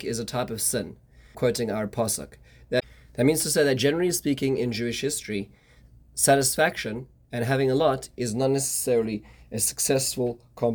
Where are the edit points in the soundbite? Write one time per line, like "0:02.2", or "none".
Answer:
0:01.3